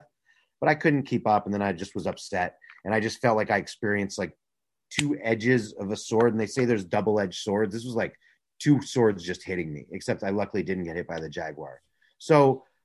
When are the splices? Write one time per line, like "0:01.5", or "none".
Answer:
none